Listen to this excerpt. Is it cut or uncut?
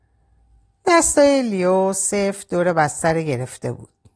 uncut